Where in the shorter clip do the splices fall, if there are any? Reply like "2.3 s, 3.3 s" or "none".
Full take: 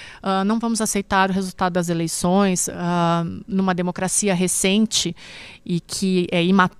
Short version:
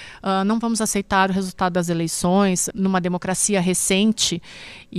2.7 s